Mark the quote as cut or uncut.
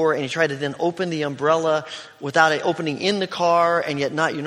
uncut